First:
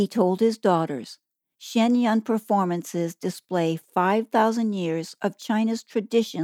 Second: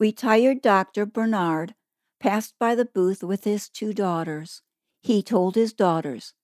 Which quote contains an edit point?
second; 1 cut; at 4.9 s

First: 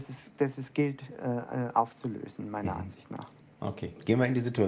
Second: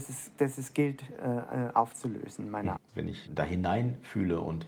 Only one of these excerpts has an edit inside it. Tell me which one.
second; 1 cut; at 2.8 s

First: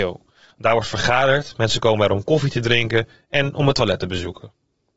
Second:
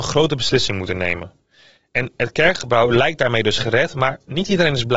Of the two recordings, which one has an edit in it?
second; 1 cut; at 1.8 s

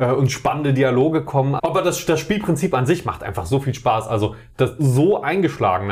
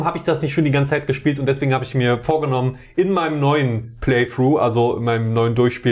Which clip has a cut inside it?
first; 2 cuts; at 1.6 s, 4.8 s

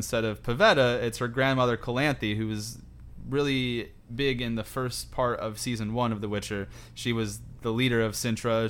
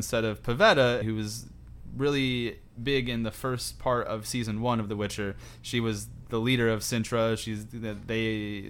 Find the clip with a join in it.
second; 1 cut; at 1.0 s

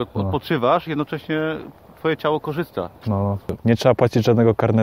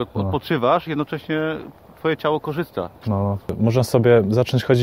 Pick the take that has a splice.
first; 1 cut; at 3.6 s

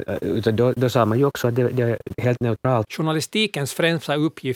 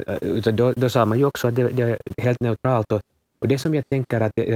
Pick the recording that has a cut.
first; 1 cut; at 2.9 s

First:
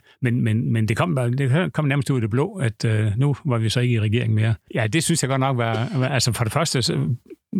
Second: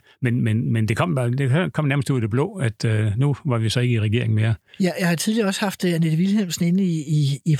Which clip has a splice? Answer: first; 1 cut; at 4.7 s

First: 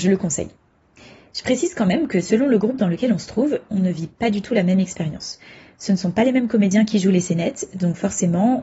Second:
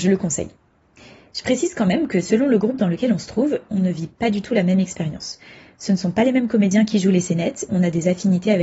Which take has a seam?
second; 1 cut; at 7.7 s

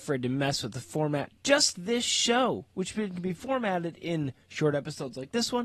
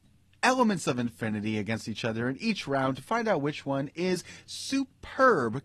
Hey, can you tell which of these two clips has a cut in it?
first; 1 cut; at 1.7 s

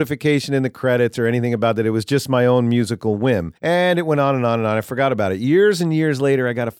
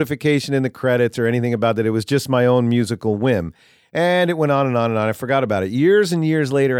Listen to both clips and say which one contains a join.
first; 1 cut; at 3.6 s

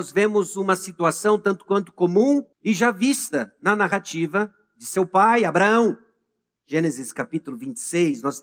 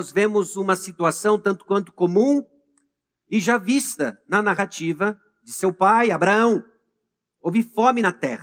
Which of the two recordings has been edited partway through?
first; 2 cuts; at 2.5 s, 6.6 s

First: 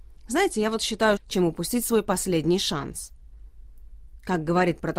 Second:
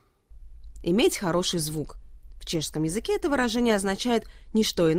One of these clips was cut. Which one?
first; 1 cut; at 1.2 s

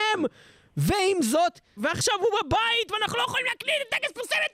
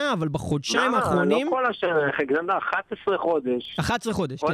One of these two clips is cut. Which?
first; 1 cut; at 1.8 s

